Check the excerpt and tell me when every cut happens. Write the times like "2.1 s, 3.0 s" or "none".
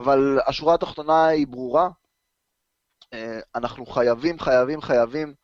none